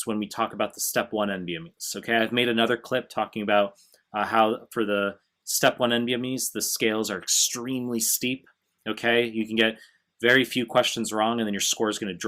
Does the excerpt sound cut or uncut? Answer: uncut